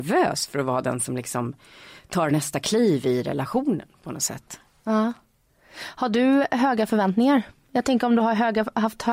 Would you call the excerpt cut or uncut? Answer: uncut